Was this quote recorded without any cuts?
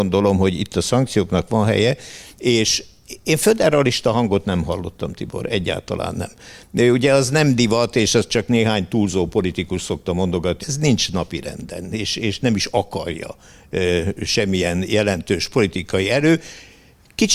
no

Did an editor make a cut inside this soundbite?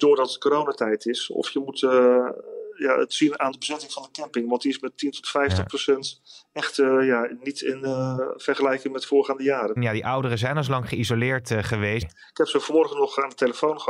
yes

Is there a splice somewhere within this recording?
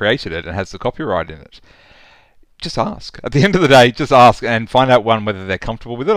no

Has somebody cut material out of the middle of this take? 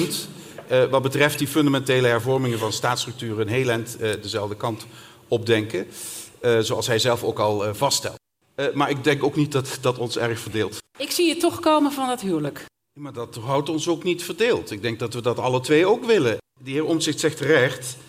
no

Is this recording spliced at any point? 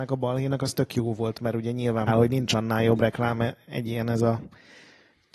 yes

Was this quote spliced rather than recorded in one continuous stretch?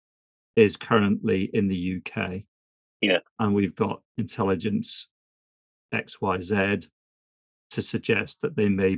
no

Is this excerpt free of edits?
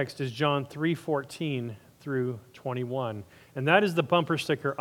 yes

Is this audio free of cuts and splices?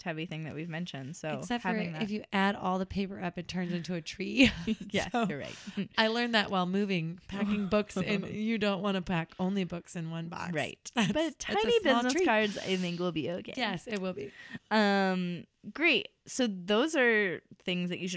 yes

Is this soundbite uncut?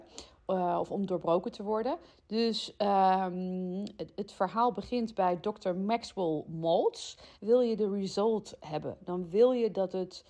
no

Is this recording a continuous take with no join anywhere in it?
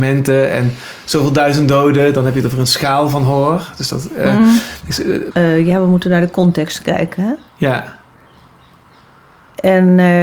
no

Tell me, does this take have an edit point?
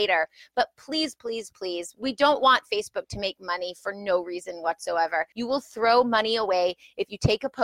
yes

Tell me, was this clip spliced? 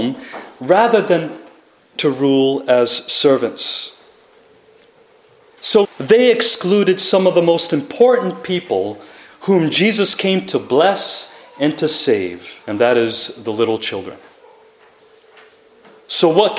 yes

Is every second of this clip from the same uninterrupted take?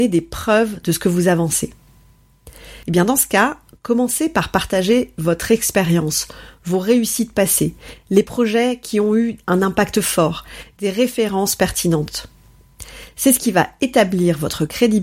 no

